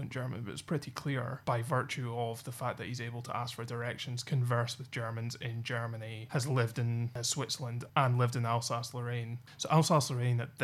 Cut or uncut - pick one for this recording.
uncut